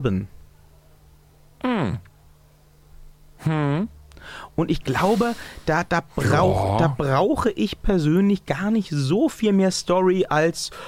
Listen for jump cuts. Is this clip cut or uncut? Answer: uncut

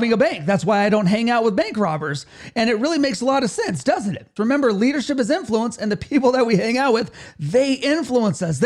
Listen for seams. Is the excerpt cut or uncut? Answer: cut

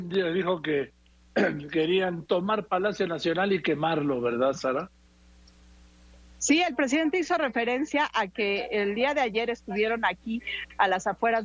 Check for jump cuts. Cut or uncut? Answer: uncut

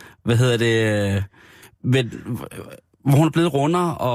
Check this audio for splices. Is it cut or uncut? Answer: uncut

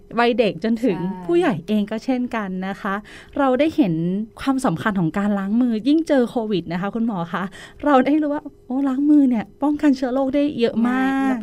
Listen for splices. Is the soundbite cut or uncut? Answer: cut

